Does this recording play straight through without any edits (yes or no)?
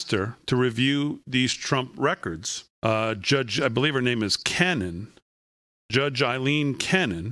no